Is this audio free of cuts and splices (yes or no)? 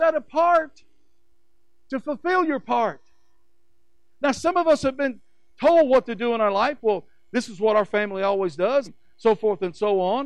no